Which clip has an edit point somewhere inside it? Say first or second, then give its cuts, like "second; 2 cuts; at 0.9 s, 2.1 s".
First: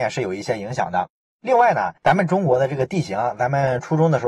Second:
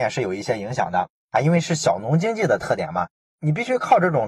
second; 1 cut; at 1.2 s